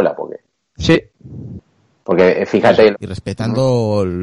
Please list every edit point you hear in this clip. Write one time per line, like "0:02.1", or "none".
0:02.9